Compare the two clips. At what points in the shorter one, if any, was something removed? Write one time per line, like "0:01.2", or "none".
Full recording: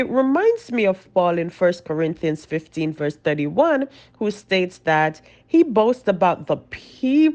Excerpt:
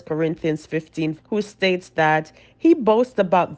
0:01.2